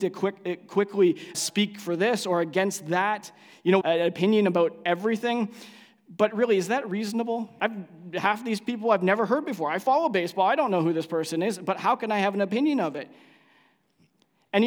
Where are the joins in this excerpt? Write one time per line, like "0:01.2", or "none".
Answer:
0:01.3
0:03.8
0:07.6